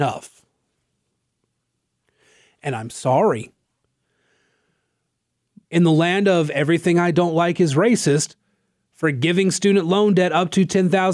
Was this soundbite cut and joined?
yes; 1 cut; at 5.6 s

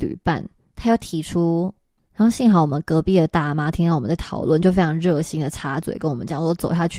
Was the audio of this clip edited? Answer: yes; 1 cut; at 2.0 s

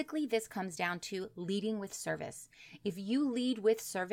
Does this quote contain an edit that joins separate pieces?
no; 0 cuts

